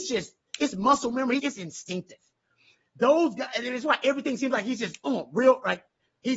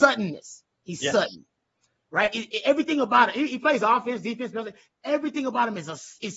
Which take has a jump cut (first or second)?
first